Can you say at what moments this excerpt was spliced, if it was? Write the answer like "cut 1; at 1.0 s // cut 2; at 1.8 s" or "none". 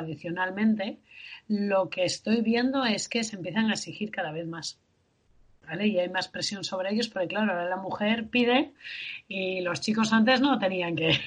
none